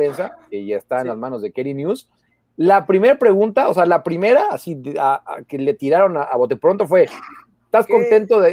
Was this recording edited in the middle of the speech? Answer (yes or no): no